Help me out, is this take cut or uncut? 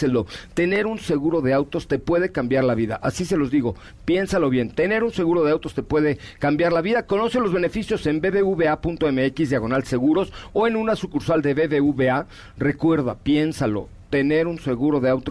uncut